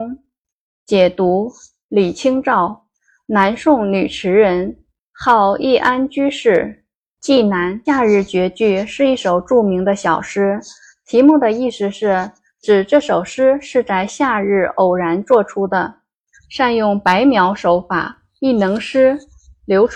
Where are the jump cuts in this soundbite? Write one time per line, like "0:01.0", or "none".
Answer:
0:07.9
0:16.3
0:18.4

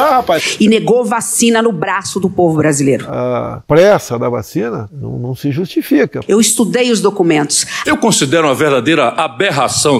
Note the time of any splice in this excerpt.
0:06.2
0:07.8

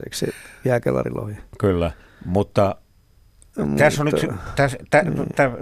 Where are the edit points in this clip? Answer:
none

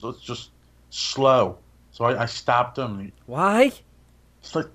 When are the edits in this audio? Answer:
0:01.8
0:03.1

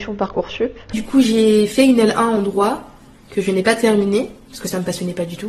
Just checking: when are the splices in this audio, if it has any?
none

